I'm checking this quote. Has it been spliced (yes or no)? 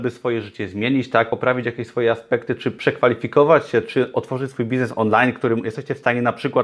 no